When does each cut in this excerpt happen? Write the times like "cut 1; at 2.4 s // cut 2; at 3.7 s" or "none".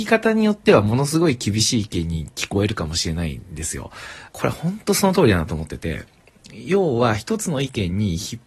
cut 1; at 4.3 s